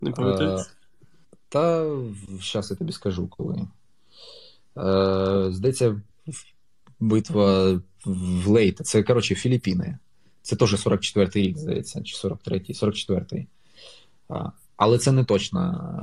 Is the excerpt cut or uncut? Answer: uncut